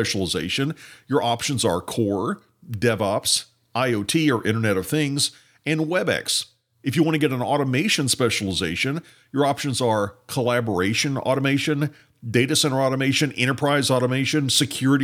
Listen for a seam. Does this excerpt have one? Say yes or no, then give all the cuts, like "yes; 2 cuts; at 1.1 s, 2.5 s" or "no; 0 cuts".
no; 0 cuts